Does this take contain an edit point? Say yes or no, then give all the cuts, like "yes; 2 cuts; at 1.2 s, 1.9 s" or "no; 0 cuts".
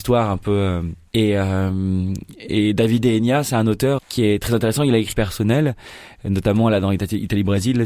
yes; 3 cuts; at 1.1 s, 4.0 s, 5.1 s